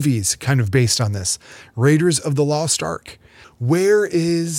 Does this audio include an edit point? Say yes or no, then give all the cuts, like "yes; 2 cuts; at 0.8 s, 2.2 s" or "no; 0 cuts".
yes; 1 cut; at 3.4 s